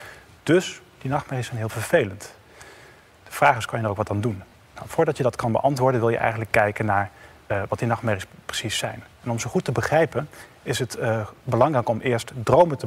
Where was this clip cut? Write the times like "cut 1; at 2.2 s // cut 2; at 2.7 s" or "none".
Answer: none

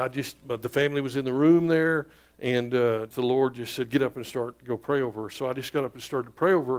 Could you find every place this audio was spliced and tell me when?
cut 1; at 3.1 s

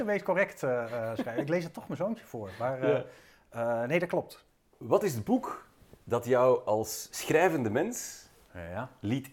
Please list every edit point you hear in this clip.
none

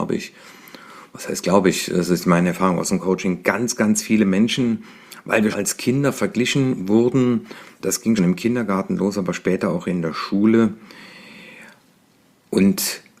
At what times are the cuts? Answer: cut 1; at 5.5 s // cut 2; at 8.2 s

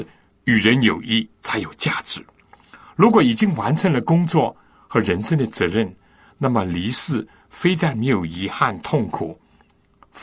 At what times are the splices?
cut 1; at 1.3 s

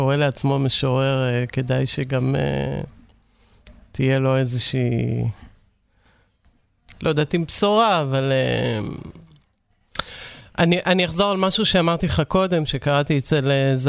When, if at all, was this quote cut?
none

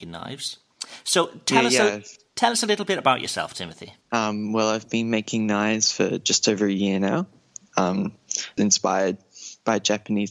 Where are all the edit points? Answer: cut 1; at 4.0 s // cut 2; at 8.6 s

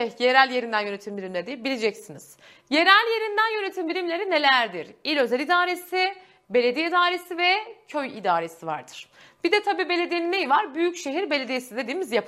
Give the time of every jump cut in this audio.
none

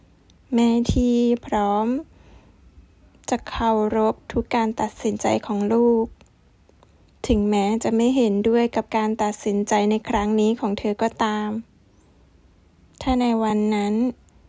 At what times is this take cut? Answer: none

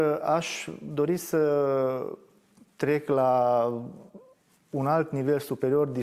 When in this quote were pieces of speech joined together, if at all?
none

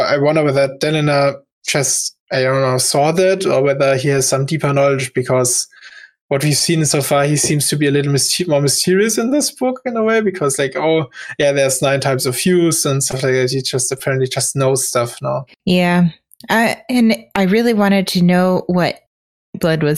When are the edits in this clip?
none

